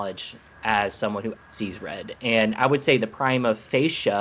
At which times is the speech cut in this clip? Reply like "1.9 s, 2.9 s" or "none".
1.4 s